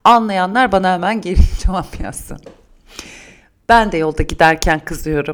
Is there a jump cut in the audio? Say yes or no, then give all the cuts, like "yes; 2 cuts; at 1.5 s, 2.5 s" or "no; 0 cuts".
no; 0 cuts